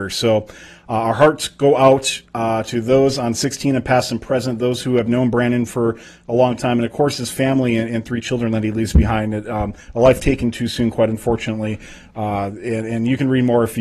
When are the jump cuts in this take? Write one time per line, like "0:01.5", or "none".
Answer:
none